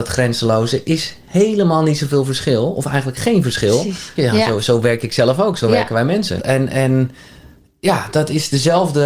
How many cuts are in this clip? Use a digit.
2